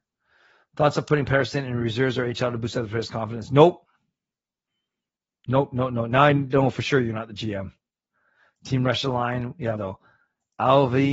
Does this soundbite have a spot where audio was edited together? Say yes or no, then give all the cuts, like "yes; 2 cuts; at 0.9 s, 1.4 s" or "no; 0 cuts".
yes; 1 cut; at 9.8 s